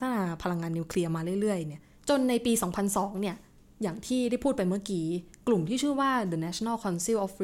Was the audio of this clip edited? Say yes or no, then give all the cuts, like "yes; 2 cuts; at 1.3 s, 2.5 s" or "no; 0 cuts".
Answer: no; 0 cuts